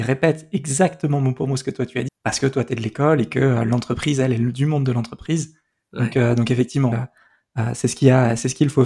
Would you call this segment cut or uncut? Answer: cut